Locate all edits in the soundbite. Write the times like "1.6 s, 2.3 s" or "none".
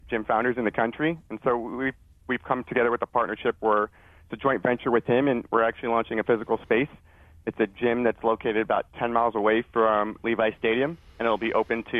none